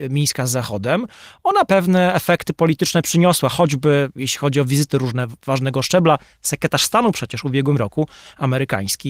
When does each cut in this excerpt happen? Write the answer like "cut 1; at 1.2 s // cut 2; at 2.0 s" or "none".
cut 1; at 1.7 s